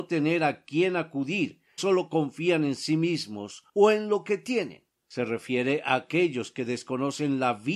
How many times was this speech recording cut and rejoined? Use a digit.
2